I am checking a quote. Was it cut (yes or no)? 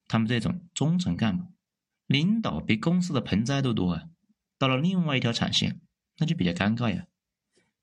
yes